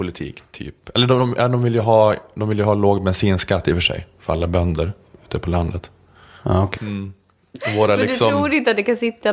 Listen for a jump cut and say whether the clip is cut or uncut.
cut